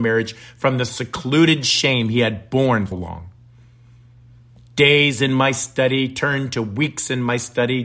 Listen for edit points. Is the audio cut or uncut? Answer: cut